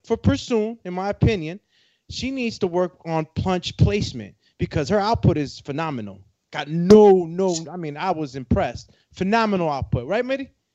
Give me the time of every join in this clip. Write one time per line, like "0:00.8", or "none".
none